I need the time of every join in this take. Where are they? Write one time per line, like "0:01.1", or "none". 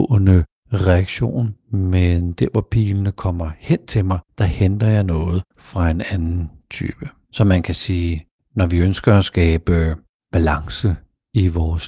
0:07.2